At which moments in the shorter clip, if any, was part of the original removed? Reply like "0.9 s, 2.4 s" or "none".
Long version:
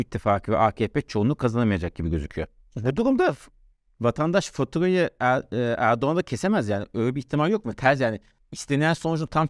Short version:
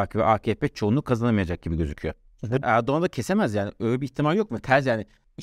2.6 s